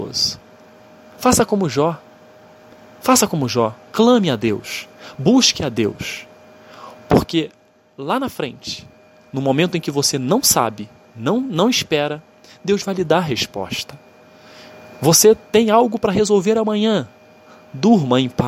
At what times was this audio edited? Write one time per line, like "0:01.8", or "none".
none